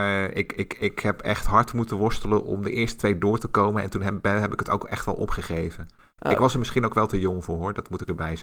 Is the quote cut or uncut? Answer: uncut